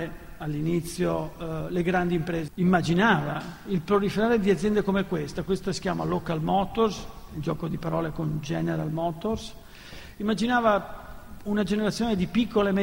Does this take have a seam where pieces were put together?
yes; 1 cut; at 2.5 s

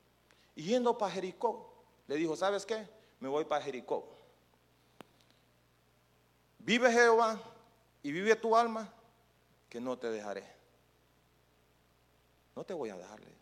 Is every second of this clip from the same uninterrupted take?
yes; 0 cuts

